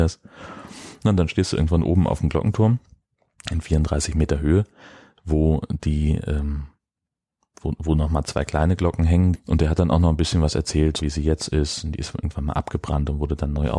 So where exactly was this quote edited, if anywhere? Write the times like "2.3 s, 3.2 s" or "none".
9.3 s, 11.0 s

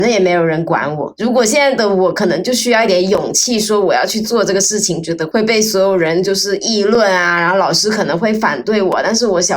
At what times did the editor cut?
none

